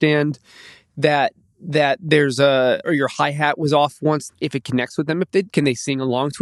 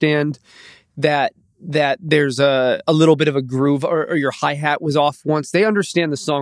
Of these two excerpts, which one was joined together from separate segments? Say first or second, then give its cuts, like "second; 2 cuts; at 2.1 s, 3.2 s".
first; 3 cuts; at 2.8 s, 4.3 s, 5.5 s